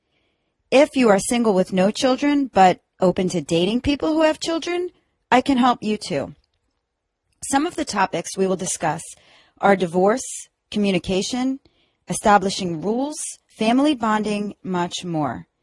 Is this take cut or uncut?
cut